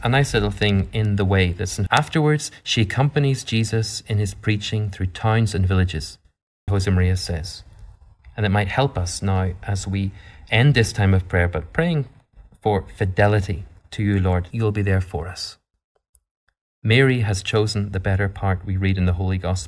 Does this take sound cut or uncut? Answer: cut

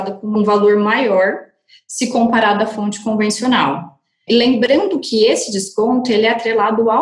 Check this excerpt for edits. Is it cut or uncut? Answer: uncut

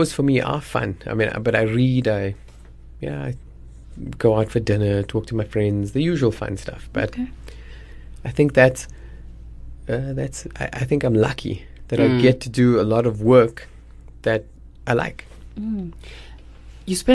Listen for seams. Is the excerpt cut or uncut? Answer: uncut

